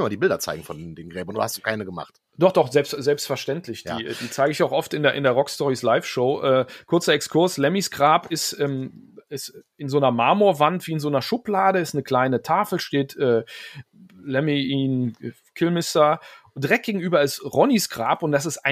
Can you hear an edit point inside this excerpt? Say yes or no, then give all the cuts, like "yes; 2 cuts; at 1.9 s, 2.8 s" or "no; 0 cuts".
no; 0 cuts